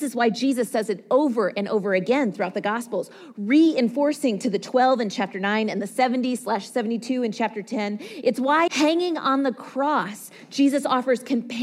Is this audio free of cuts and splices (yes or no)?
no